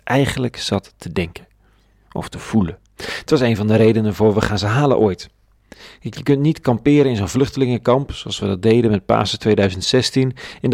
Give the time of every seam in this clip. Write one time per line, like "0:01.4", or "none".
0:02.9